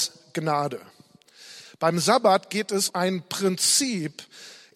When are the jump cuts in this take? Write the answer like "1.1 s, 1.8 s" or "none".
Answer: 1.7 s, 2.9 s